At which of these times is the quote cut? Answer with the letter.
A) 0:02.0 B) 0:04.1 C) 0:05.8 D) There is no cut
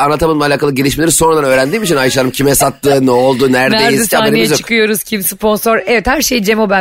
D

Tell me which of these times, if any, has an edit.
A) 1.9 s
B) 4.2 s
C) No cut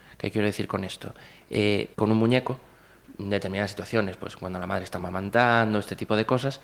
A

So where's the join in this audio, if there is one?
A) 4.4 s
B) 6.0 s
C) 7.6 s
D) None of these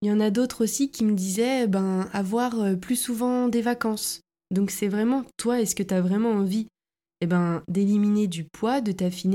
A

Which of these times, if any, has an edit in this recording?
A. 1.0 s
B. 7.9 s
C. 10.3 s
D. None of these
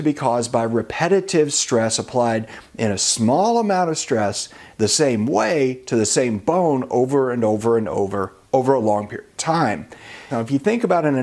C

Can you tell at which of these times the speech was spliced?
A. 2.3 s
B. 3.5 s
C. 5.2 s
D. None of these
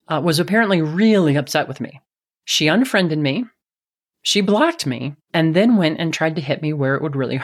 C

